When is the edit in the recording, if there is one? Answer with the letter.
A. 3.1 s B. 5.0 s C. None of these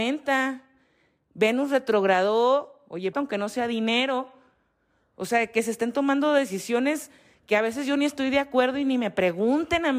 A